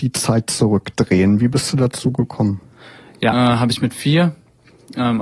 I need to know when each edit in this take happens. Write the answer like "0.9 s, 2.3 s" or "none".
3.3 s